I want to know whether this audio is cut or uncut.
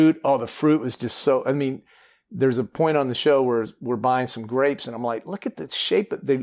uncut